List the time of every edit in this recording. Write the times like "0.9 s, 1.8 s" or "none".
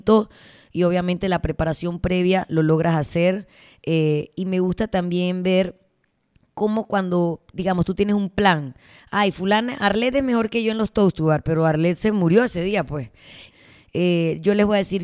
13.5 s